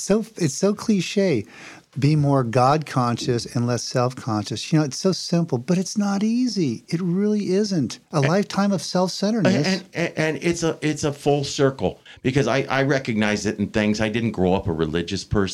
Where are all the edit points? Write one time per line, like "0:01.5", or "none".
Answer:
none